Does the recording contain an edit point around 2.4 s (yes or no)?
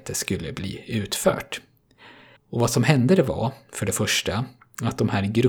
yes